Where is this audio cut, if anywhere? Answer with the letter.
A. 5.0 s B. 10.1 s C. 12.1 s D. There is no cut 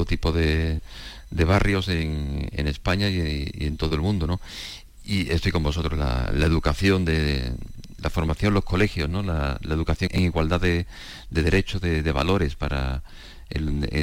B